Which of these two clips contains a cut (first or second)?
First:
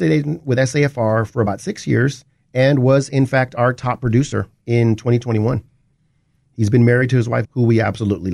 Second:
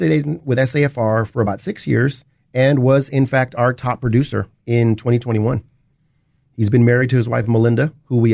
first